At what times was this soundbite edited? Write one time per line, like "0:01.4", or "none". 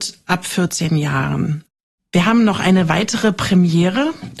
0:02.0